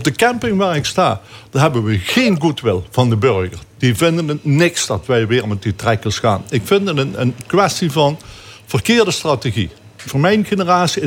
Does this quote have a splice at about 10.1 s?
yes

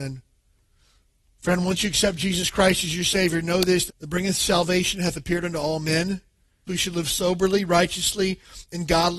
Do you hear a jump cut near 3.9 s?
yes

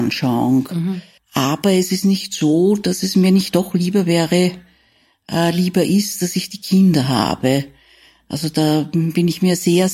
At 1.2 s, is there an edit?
yes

